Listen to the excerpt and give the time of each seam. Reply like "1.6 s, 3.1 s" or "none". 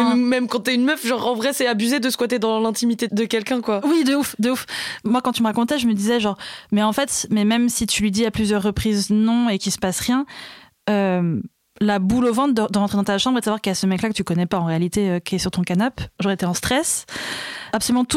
none